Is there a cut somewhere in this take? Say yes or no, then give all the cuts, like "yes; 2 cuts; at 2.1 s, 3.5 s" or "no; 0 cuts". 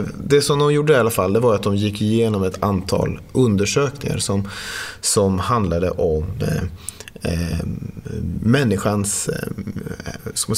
no; 0 cuts